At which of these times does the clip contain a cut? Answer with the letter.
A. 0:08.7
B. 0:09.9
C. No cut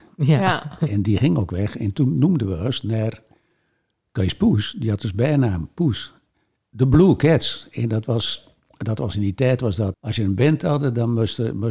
B